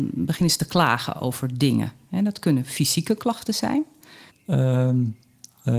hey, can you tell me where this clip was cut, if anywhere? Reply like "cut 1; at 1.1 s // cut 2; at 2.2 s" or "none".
cut 1; at 4.3 s